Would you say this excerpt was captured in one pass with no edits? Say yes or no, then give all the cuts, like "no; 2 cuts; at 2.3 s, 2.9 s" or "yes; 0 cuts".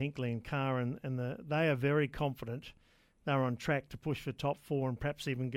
yes; 0 cuts